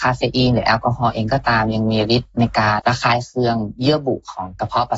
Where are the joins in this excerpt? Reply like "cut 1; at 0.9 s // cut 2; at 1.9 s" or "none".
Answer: cut 1; at 2.8 s